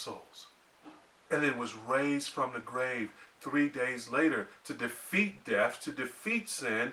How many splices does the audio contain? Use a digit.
1